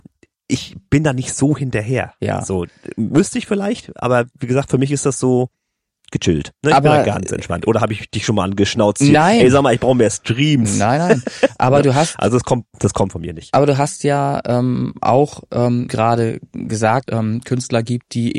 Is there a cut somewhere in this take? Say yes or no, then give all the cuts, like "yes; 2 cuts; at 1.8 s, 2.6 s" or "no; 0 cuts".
yes; 2 cuts; at 15.9 s, 17.1 s